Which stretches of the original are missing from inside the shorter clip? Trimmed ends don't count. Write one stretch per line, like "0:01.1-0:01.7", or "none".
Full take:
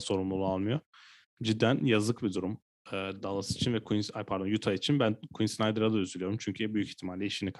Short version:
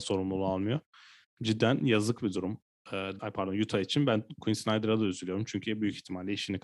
0:03.2-0:04.1